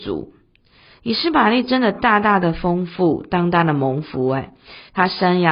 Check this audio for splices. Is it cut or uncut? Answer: uncut